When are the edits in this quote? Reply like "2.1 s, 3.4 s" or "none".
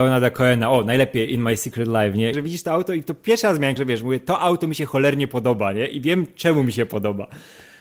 2.3 s, 3.8 s